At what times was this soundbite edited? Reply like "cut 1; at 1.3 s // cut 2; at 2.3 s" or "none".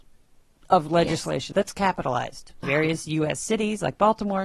cut 1; at 1.5 s // cut 2; at 2.6 s